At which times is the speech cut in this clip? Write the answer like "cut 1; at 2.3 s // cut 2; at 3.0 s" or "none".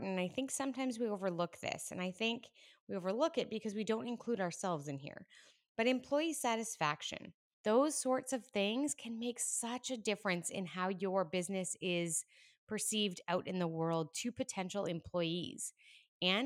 cut 1; at 7.5 s